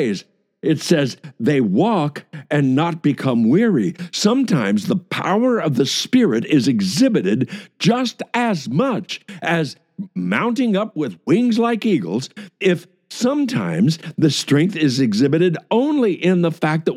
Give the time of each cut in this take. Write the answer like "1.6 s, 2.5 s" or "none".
none